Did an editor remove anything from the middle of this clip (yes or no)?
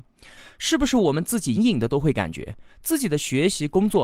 yes